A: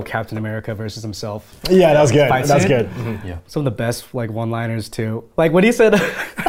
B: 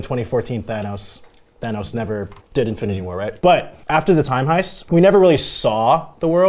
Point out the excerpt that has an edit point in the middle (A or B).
B